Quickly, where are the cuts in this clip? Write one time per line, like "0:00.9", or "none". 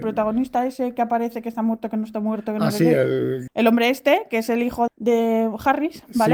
0:03.5
0:04.9